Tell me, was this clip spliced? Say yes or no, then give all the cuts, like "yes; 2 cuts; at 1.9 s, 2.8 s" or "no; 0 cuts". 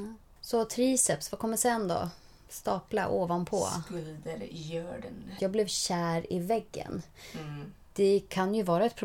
yes; 1 cut; at 5.4 s